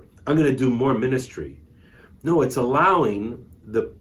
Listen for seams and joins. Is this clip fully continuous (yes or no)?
yes